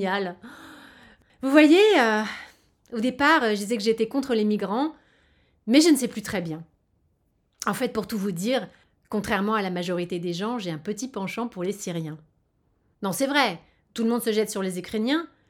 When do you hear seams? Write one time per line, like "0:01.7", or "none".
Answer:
none